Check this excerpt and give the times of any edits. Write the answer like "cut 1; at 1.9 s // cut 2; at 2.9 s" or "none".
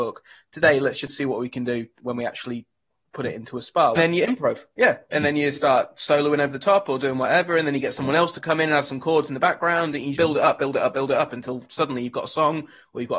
cut 1; at 4.0 s // cut 2; at 10.2 s